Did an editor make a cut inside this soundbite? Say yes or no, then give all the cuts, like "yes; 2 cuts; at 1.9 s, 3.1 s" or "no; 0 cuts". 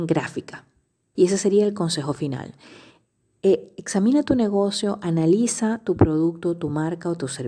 yes; 1 cut; at 1.1 s